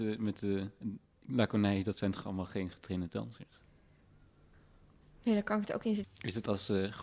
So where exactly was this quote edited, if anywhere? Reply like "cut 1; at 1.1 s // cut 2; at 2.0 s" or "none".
cut 1; at 6.0 s